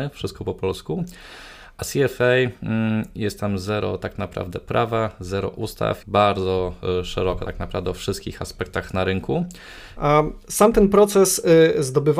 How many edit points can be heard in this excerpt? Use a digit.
2